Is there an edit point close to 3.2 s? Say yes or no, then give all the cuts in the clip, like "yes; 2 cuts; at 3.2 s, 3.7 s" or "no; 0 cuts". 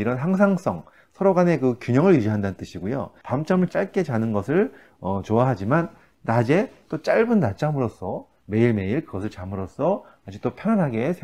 yes; 1 cut; at 3.2 s